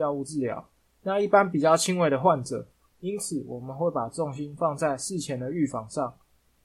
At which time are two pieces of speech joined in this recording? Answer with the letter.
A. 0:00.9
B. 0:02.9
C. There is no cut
B